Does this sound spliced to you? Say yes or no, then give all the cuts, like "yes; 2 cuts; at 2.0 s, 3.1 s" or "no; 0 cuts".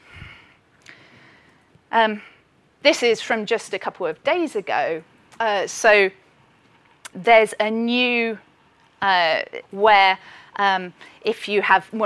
yes; 2 cuts; at 7.1 s, 9.6 s